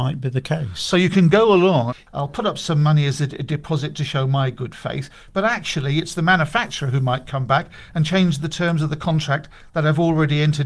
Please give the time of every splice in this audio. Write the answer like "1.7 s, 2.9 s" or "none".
1.9 s